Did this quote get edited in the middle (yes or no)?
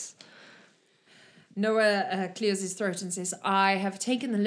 no